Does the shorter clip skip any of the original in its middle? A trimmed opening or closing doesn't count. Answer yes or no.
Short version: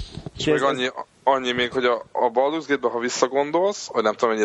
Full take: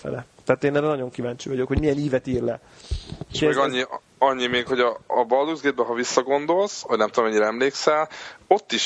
no